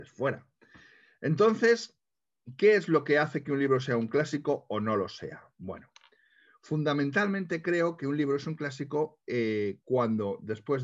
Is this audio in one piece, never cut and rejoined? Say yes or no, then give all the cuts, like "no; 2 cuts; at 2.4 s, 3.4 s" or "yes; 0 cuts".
yes; 0 cuts